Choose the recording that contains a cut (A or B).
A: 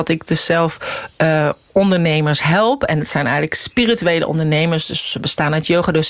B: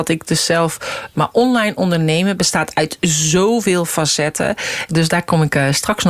B